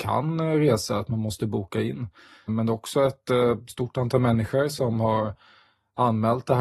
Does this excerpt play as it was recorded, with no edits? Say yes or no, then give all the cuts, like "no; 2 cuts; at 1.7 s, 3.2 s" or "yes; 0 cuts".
no; 1 cut; at 2.5 s